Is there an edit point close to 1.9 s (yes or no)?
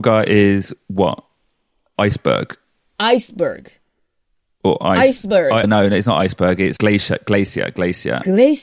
no